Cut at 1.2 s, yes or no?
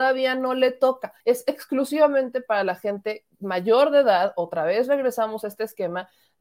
yes